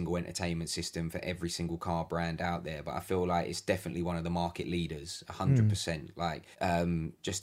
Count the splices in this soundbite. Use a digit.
1